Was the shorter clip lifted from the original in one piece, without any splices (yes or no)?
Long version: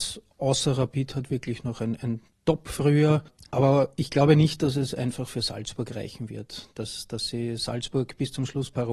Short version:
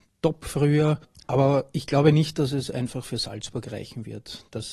yes